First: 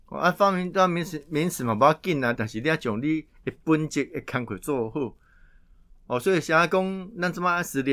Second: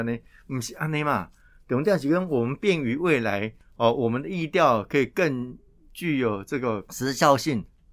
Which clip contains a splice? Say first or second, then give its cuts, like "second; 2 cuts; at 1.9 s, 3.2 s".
first; 1 cut; at 2.4 s